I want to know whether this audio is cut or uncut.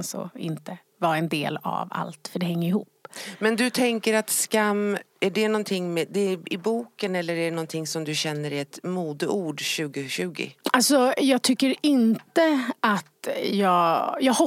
uncut